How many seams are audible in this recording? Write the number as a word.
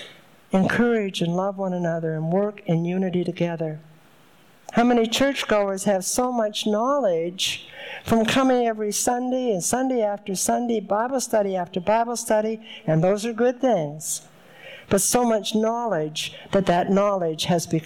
one